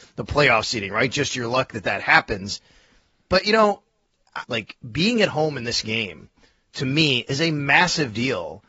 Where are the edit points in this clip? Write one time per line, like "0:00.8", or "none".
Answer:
0:04.4